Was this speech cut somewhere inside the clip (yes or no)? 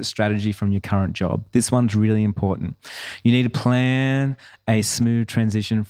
no